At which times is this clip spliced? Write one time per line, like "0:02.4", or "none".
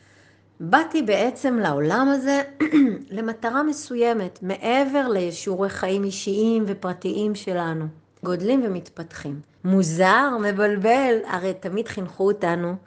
0:08.2
0:09.6